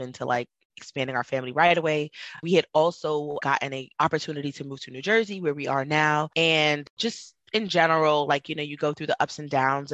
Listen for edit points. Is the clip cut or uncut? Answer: uncut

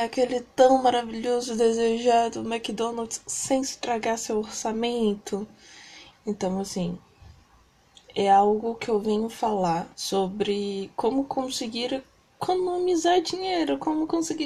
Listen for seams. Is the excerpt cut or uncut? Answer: cut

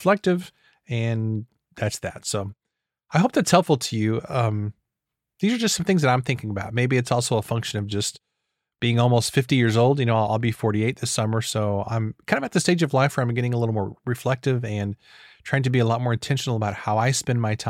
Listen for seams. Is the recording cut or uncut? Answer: uncut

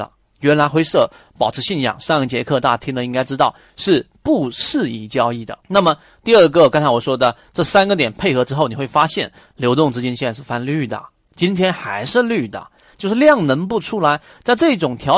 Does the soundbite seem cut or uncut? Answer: cut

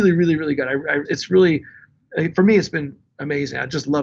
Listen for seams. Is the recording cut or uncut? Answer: cut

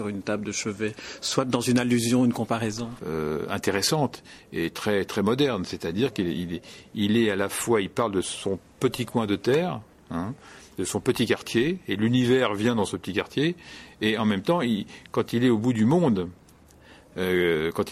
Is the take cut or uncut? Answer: cut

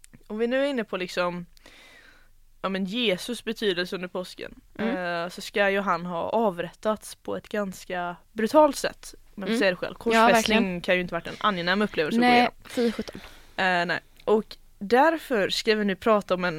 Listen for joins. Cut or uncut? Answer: uncut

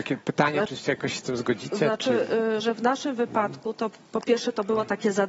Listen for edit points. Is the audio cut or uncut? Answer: cut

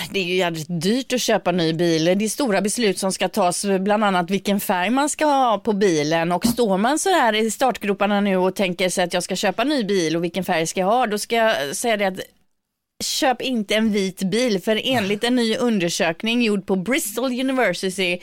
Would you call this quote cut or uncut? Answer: uncut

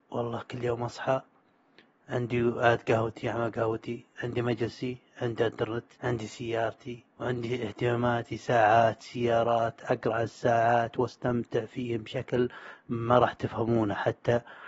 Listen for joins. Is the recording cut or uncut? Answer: cut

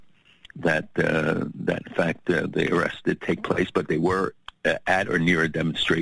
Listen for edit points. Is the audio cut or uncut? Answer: uncut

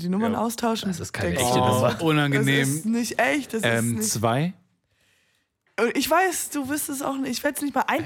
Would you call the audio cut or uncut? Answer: uncut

